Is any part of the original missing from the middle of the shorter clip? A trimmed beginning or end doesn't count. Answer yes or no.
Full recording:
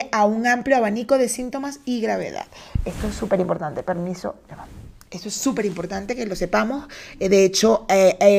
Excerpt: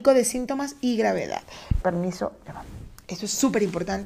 yes